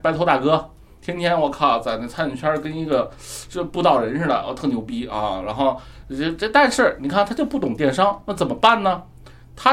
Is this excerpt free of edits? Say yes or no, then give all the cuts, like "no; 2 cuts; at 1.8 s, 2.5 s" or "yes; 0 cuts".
yes; 0 cuts